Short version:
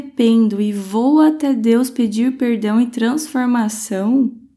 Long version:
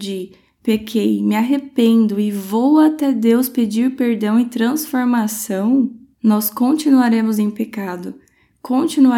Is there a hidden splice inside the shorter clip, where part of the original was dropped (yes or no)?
no